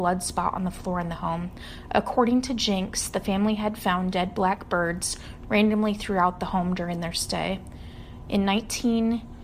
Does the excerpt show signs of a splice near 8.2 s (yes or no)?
no